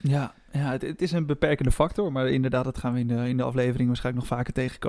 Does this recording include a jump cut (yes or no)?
no